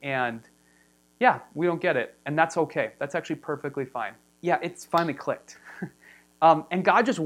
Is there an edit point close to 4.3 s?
yes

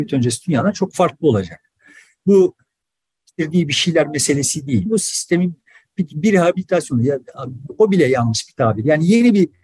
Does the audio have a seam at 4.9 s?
yes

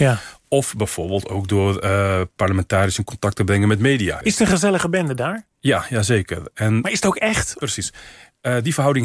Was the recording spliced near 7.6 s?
yes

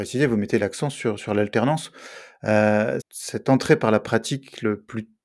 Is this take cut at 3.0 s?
yes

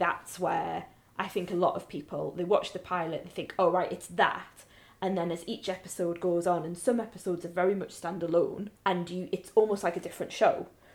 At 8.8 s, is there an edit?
yes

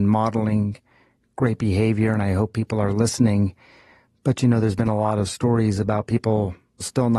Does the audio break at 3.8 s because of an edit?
no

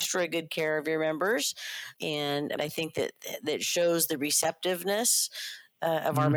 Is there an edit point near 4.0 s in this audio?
no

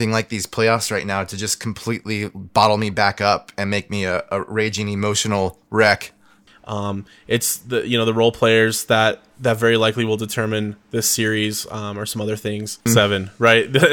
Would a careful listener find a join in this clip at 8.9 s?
no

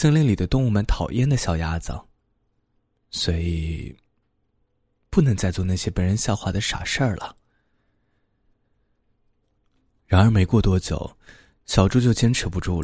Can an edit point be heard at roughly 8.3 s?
no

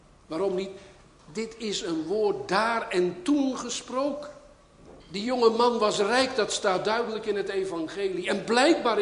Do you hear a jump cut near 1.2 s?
no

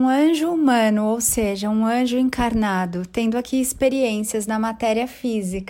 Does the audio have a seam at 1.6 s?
no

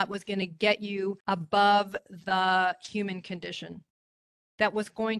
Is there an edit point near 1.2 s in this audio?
yes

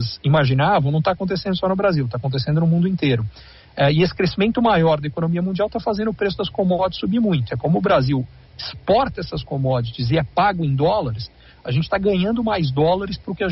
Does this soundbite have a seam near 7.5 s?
yes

